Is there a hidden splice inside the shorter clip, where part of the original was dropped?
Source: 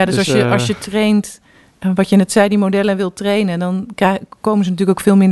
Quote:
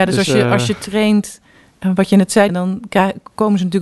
yes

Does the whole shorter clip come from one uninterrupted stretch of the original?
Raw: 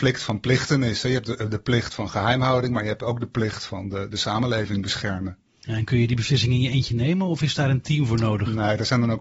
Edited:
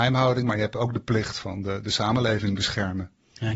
yes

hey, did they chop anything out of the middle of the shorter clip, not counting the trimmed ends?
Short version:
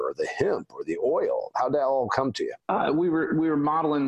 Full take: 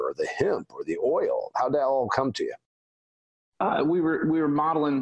yes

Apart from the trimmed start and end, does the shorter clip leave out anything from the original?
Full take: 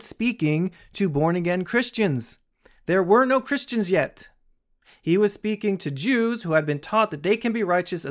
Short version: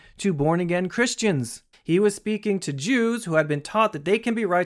yes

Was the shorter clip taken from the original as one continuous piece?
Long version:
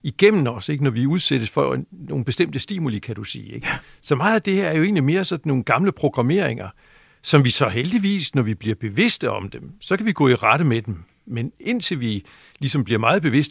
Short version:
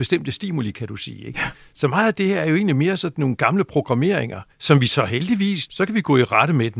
no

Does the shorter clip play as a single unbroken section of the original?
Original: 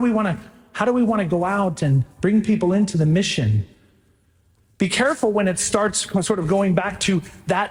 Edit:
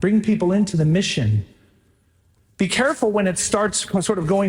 yes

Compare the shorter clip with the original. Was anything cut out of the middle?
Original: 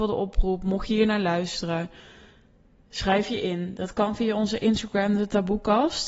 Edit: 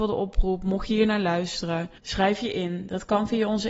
yes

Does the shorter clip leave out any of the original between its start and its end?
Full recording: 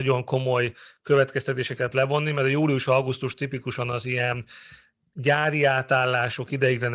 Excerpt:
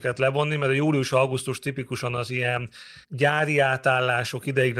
yes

